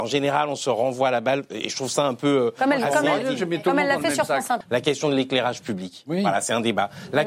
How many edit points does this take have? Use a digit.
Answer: 1